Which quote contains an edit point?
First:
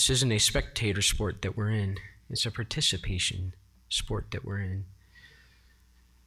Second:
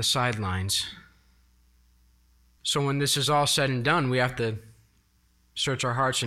second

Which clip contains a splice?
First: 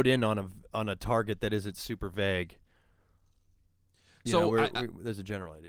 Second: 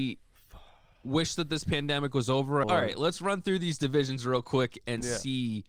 second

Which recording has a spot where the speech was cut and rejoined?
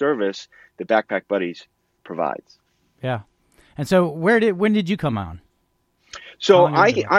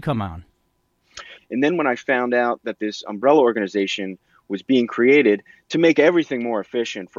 second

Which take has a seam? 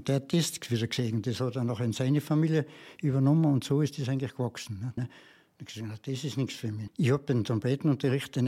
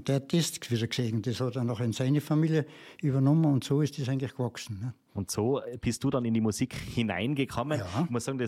first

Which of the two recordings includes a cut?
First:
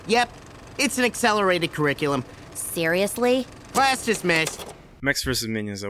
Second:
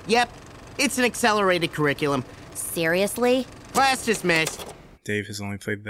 second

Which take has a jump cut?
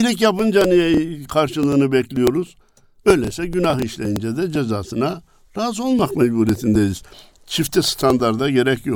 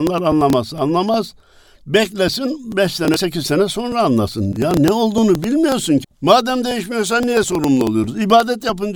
second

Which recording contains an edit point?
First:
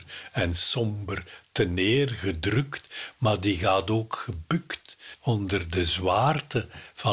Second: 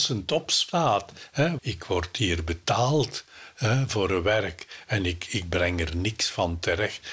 second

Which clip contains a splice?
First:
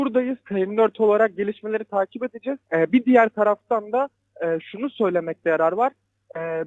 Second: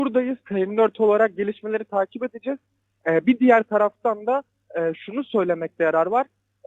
first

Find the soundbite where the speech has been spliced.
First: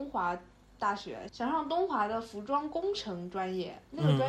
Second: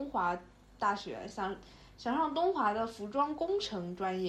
first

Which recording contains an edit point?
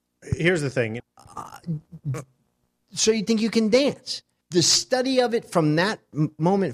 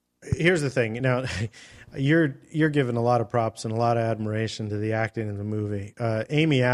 first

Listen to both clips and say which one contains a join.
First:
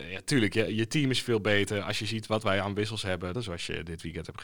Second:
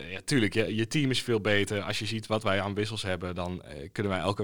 first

